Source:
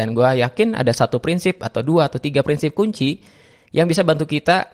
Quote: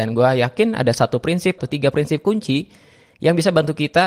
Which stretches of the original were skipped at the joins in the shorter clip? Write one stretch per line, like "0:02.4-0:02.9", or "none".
0:01.6-0:02.1